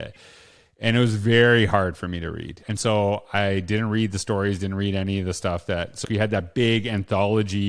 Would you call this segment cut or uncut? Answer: cut